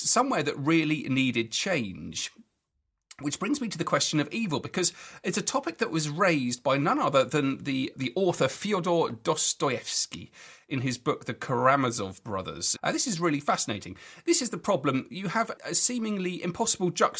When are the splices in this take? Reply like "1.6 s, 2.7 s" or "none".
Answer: 7.9 s, 12.8 s, 15.6 s